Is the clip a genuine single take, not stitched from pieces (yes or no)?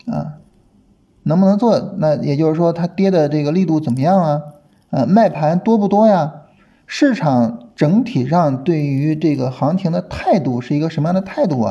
yes